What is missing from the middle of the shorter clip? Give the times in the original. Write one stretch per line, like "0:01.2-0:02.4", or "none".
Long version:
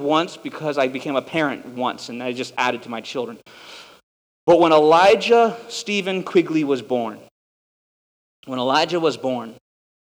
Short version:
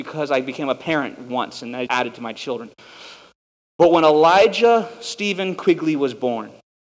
0:02.3-0:02.5